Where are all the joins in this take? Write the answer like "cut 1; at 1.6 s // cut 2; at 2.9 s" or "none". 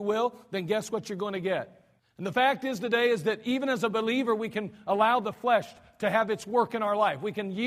cut 1; at 2.0 s

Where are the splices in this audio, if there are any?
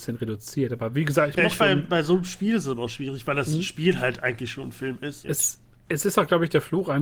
cut 1; at 1.6 s // cut 2; at 5.2 s

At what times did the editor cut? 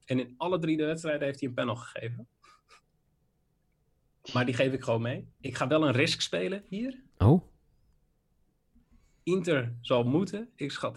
cut 1; at 5.3 s

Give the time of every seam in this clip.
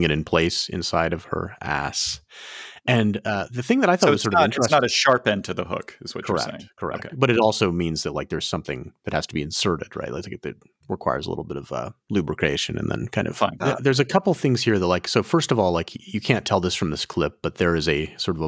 cut 1; at 13.6 s

